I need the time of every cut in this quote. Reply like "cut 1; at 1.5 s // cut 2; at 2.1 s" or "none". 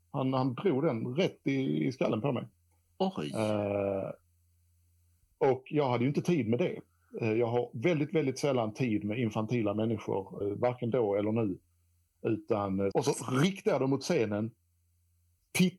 cut 1; at 10.4 s // cut 2; at 12.9 s